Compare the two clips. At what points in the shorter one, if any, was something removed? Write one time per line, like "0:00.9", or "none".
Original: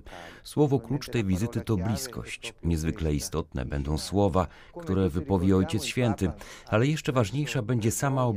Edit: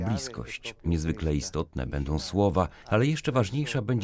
0:02.8